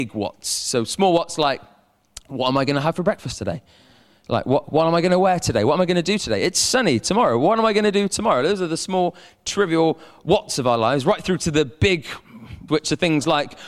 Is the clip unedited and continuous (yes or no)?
no